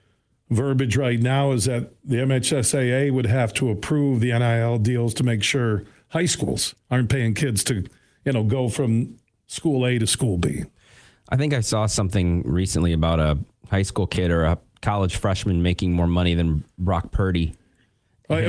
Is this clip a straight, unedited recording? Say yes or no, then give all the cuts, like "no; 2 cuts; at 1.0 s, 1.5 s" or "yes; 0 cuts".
yes; 0 cuts